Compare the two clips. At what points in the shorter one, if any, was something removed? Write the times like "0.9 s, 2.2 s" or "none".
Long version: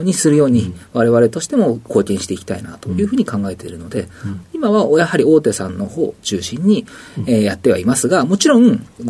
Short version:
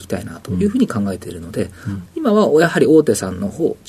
none